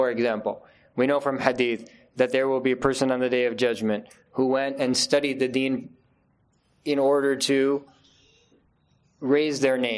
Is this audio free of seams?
yes; 0 cuts

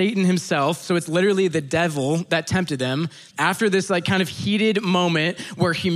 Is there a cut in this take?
yes; 1 cut; at 3.3 s

